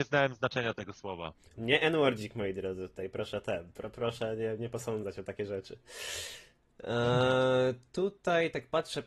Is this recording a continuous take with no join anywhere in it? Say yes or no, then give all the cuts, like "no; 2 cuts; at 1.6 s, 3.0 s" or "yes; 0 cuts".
yes; 0 cuts